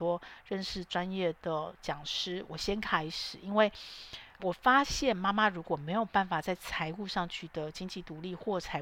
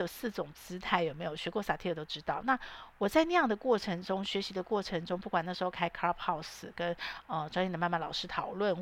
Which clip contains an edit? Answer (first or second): first